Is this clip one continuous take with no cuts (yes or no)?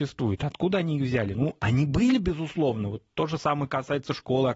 yes